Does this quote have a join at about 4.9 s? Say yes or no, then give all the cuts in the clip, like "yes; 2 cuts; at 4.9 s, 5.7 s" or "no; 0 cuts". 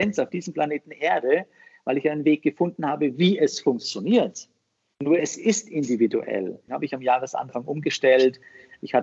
no; 1 cut; at 6.7 s